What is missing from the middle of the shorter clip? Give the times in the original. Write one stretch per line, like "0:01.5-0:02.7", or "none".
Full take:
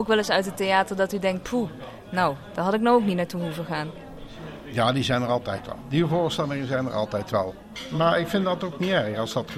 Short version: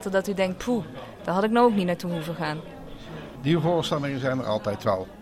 0:02.0-0:02.5
0:04.7-0:05.8